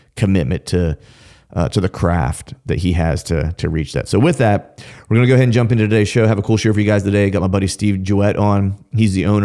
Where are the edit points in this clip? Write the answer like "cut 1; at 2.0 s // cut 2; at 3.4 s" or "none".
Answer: none